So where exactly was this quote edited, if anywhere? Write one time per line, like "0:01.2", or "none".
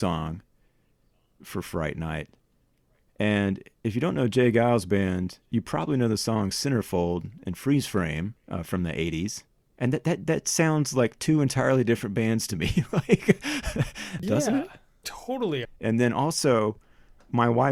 0:14.2
0:15.6